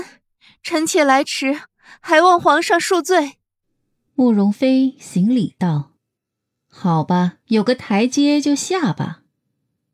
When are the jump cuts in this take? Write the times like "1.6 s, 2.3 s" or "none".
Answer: 4.5 s, 6.0 s, 7.4 s

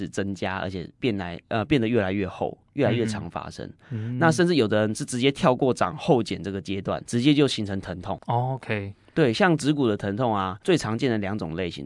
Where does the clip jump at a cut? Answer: none

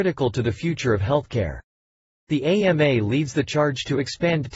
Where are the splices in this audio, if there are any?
none

